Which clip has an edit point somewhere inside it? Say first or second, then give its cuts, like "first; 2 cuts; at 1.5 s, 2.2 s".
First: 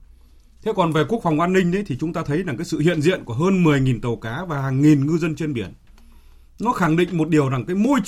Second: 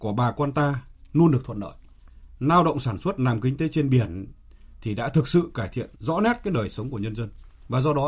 second; 1 cut; at 6.0 s